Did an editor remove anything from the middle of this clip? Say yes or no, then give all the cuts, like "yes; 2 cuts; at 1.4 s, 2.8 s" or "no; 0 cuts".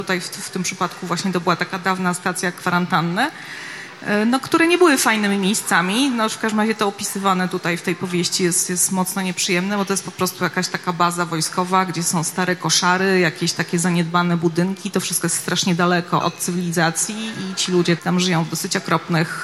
yes; 2 cuts; at 16.2 s, 18.0 s